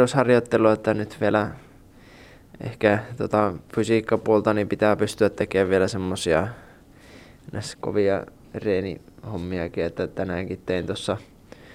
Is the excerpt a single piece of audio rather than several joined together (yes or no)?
no